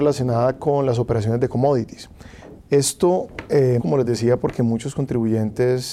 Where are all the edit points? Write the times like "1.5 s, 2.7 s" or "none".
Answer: 2.6 s, 3.8 s